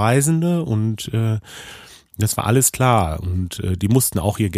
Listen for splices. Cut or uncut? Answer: uncut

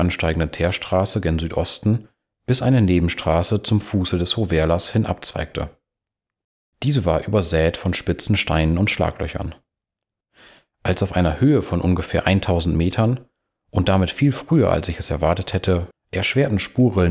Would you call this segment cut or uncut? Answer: cut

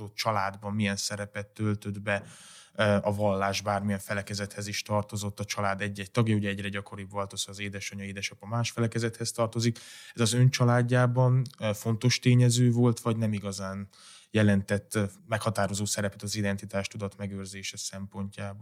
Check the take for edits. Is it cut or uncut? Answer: cut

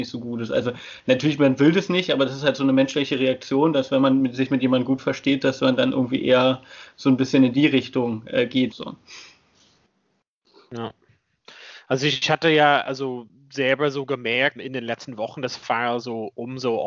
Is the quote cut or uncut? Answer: cut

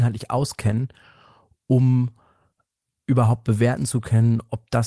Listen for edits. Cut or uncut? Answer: uncut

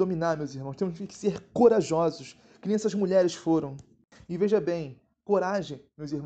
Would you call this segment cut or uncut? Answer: uncut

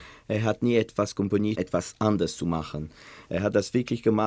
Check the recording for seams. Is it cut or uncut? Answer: cut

